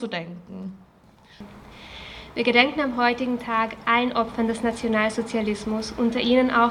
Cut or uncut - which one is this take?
uncut